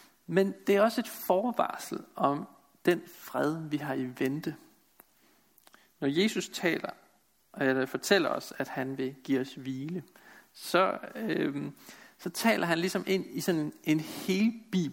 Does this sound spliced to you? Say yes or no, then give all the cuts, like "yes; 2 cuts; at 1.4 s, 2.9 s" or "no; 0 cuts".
no; 0 cuts